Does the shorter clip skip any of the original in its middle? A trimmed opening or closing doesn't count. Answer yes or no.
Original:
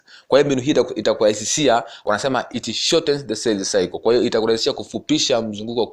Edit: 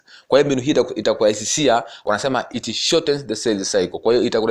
no